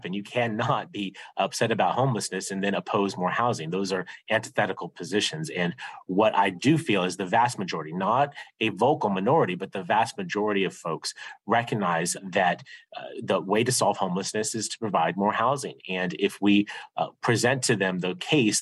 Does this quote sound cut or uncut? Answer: uncut